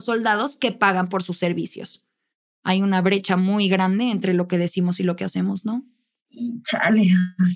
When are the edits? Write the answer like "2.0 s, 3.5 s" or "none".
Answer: none

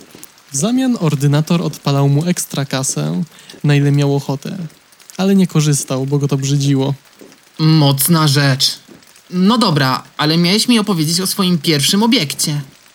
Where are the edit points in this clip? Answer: 3.6 s

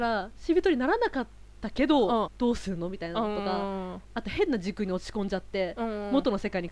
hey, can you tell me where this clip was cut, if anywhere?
2.3 s

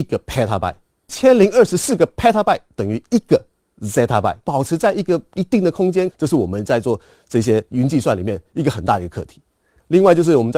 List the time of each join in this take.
4.4 s, 6.1 s

